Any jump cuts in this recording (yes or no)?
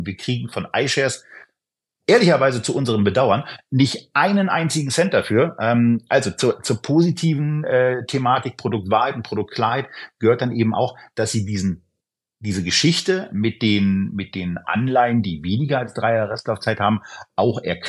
no